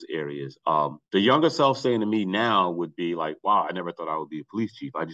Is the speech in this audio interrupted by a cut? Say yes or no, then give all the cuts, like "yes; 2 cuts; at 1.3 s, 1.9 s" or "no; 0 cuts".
yes; 1 cut; at 1.1 s